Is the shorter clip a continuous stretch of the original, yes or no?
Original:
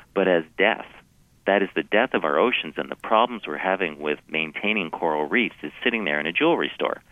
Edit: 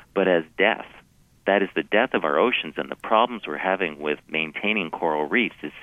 yes